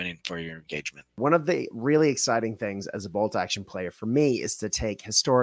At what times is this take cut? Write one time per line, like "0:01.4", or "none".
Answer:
0:01.1